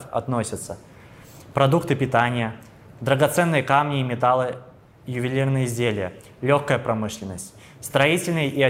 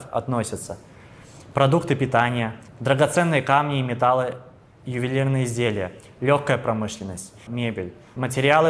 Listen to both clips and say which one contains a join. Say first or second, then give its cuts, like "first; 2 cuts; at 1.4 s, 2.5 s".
second; 2 cuts; at 2.7 s, 7.5 s